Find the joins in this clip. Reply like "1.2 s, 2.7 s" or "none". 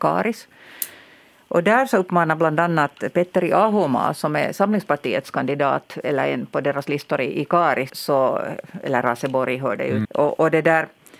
7.9 s, 10.0 s

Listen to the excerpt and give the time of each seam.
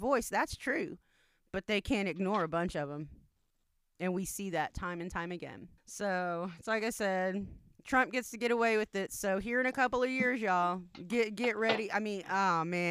5.8 s

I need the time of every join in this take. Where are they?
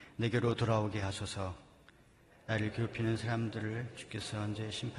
2.3 s

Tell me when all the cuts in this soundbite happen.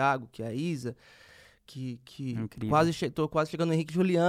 none

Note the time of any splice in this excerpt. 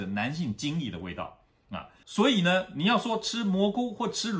2.0 s

